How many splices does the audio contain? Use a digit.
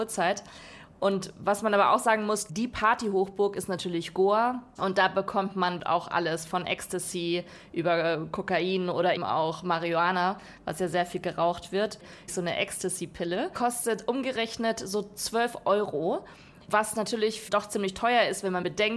1